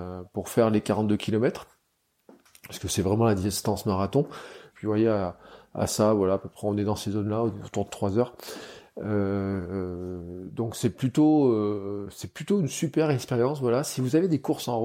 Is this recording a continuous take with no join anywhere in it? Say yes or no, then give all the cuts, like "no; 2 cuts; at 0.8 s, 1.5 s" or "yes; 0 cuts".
no; 1 cut; at 4.7 s